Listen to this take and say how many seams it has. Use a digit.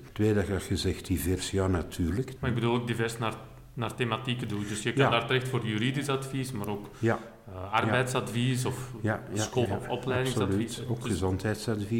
2